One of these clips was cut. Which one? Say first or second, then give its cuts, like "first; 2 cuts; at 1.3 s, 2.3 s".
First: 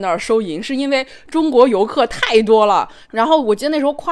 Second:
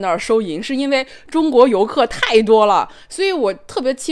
first; 1 cut; at 3.1 s